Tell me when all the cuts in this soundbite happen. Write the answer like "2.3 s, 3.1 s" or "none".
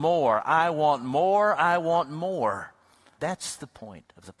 3.2 s